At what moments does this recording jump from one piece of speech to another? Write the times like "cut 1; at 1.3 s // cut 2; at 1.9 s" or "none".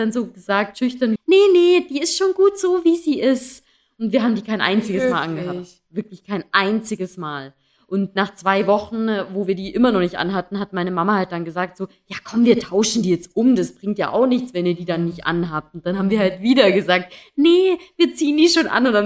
cut 1; at 1.2 s